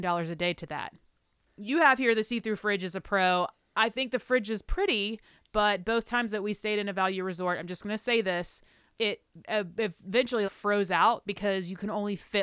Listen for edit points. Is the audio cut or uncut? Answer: cut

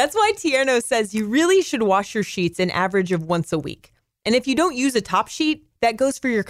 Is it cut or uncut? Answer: uncut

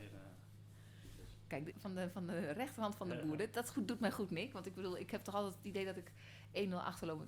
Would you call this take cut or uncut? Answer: cut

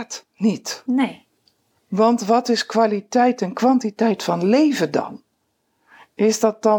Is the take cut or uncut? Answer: uncut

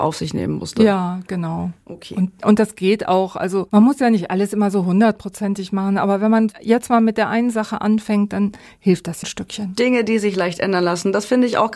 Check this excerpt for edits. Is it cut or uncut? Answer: cut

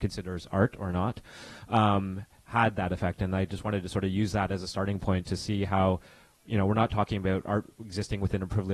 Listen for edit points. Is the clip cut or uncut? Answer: uncut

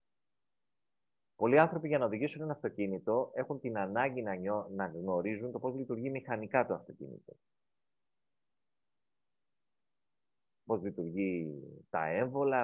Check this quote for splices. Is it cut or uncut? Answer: uncut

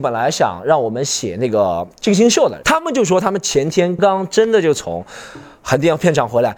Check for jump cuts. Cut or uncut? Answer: cut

